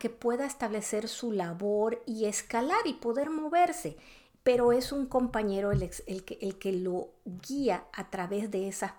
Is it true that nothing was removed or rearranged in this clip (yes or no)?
yes